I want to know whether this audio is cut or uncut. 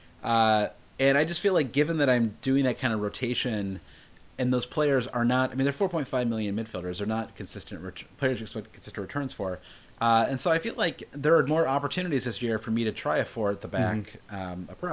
uncut